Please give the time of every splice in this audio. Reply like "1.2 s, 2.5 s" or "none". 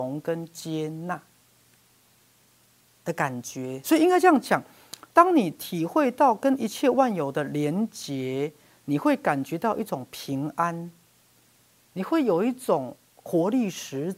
none